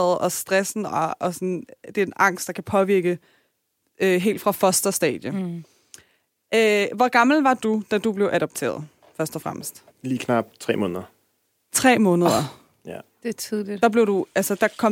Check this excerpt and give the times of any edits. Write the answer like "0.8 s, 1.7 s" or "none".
9.9 s